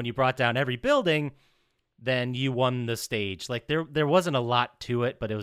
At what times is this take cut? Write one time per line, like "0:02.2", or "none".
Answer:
none